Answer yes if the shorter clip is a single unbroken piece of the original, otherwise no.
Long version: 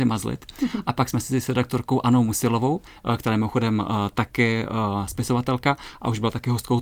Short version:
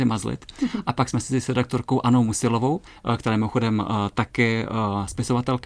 yes